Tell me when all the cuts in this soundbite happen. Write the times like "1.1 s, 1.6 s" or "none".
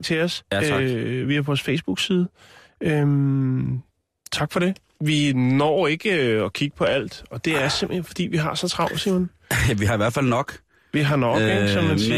none